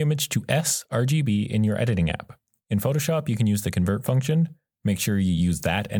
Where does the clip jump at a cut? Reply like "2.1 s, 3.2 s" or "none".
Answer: none